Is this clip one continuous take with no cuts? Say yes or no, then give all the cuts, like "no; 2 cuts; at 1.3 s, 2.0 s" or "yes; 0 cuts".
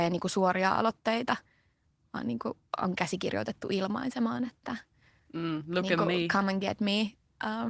yes; 0 cuts